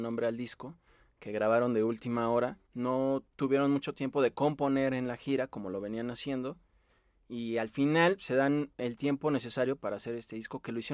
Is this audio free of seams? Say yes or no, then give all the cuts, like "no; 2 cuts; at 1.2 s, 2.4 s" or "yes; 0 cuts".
no; 1 cut; at 2.7 s